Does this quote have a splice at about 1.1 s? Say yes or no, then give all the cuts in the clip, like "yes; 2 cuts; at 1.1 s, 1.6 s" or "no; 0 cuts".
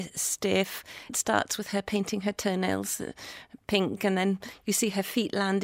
yes; 1 cut; at 1.1 s